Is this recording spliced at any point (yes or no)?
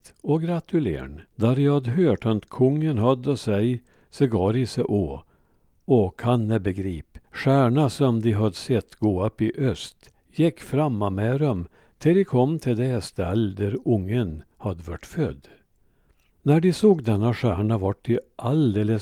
yes